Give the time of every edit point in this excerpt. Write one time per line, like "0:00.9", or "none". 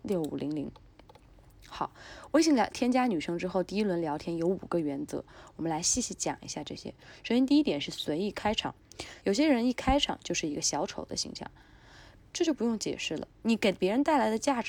0:09.2